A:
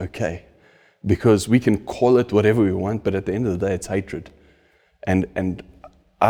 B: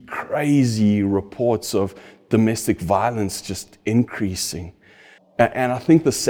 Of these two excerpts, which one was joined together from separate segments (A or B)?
B